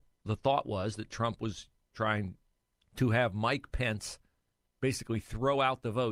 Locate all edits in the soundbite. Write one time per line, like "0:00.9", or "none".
0:02.8

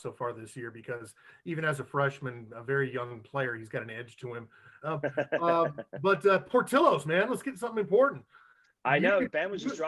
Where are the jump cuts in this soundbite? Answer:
0:04.8

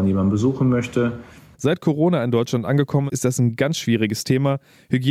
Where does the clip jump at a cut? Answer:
0:01.5
0:03.1

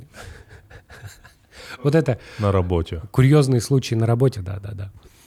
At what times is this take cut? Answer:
0:04.3

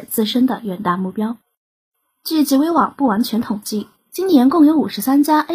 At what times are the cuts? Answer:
0:02.0
0:04.1

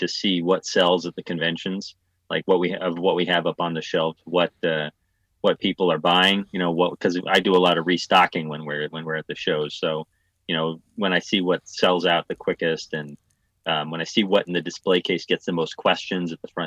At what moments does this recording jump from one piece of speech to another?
none

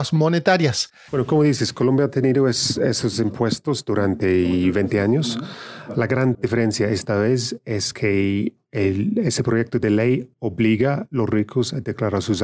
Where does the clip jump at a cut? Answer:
0:01.1

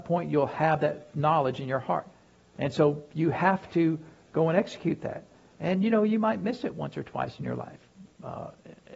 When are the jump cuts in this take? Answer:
0:02.5

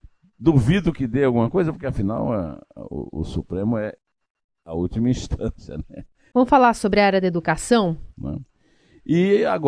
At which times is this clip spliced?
0:06.3
0:08.1

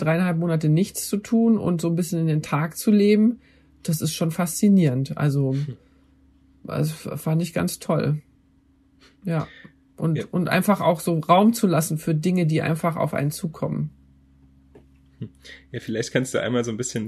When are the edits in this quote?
none

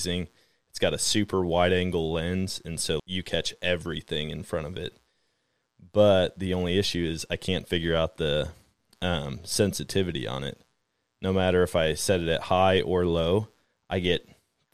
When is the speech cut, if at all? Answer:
0:03.0

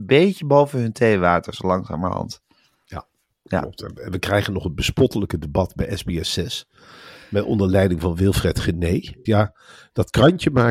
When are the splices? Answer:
0:09.3

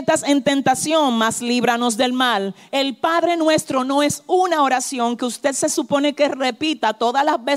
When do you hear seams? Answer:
none

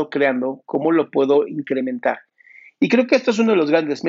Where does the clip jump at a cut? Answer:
none

